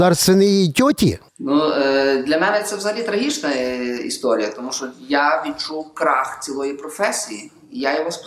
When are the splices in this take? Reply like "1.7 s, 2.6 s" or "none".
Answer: 1.3 s